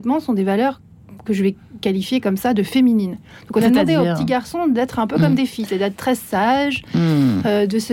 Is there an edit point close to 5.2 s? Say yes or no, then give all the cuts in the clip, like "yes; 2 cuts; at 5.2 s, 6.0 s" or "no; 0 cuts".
no; 0 cuts